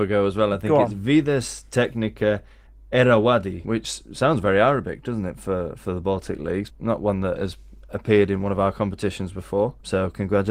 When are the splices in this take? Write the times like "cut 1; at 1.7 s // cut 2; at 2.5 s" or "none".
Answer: cut 1; at 6.7 s